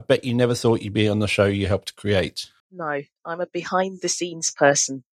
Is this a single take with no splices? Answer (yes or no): yes